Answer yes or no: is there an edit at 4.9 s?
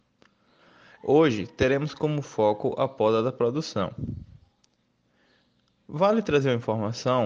no